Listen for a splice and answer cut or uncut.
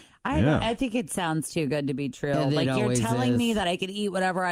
uncut